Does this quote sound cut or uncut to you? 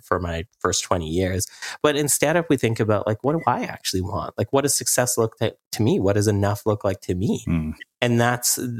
uncut